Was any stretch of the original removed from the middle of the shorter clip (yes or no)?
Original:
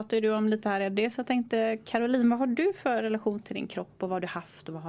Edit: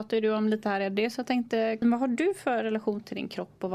yes